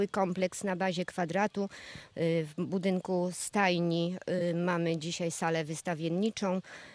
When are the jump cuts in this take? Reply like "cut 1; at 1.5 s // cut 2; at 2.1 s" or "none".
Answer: cut 1; at 2.1 s

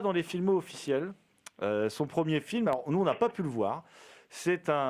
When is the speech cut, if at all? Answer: none

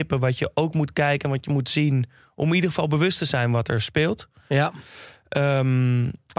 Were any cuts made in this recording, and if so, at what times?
none

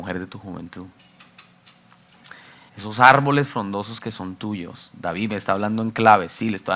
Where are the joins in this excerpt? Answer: cut 1; at 2.7 s

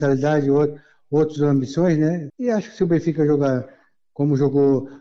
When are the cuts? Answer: cut 1; at 2.3 s

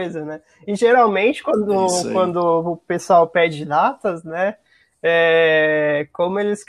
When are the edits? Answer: none

